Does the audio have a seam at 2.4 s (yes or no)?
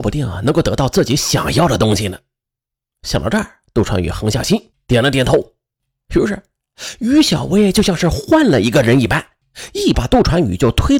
no